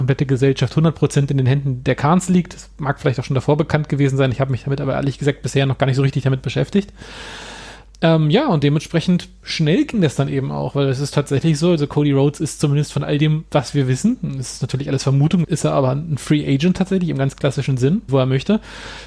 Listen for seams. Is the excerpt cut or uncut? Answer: cut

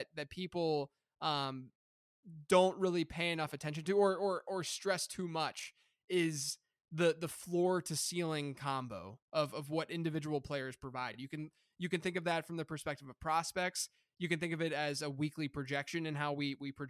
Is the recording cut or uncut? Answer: uncut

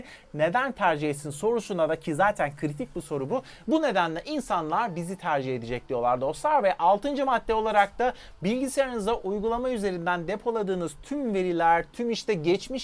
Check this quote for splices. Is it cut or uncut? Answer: cut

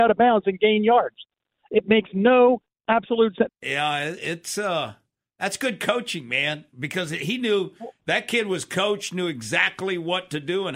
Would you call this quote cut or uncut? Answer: cut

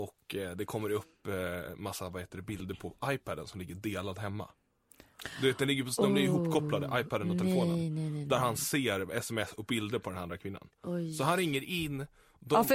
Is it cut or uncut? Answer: uncut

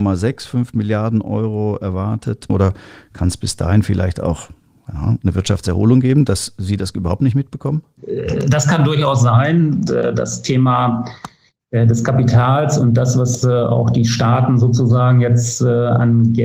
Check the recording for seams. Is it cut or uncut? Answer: cut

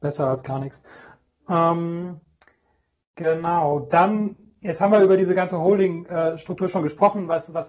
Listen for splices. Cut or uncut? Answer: uncut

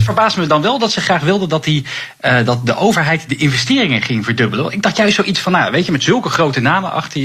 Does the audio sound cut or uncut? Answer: uncut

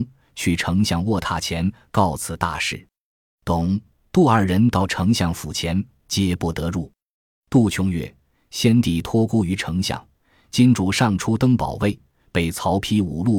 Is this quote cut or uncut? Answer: uncut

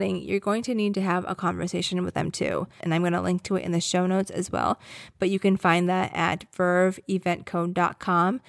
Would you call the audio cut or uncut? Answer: cut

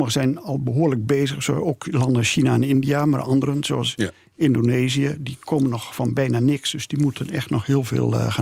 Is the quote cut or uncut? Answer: uncut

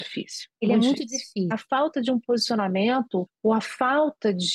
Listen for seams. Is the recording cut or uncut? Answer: cut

